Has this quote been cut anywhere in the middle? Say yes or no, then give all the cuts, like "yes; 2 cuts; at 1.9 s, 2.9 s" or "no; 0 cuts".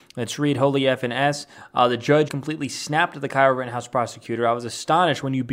yes; 1 cut; at 2.3 s